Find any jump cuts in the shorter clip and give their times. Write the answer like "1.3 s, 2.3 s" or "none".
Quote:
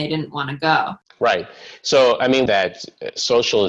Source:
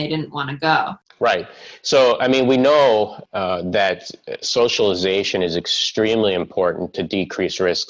2.5 s